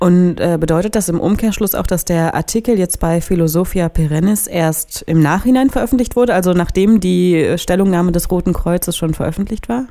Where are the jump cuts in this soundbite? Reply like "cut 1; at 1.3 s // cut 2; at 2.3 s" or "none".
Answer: none